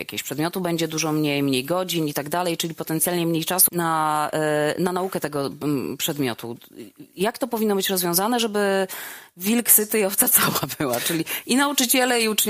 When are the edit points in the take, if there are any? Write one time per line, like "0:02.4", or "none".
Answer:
0:03.7